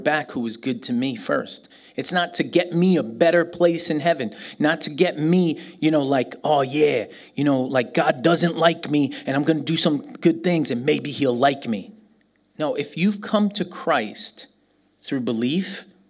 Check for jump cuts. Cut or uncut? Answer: uncut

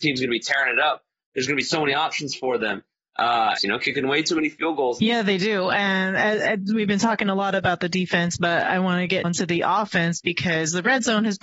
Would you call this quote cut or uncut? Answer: cut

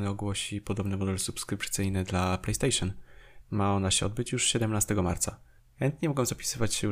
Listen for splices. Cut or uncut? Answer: cut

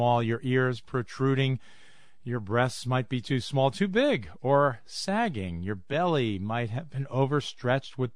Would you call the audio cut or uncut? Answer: uncut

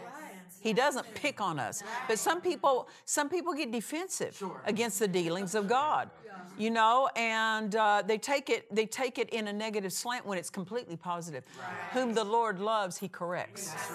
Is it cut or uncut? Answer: uncut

